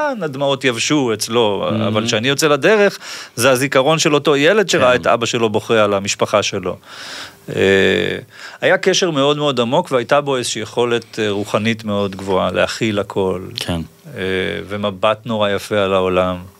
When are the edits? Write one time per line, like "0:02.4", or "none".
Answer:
none